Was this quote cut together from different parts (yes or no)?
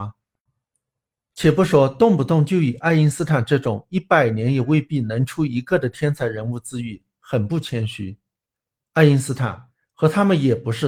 no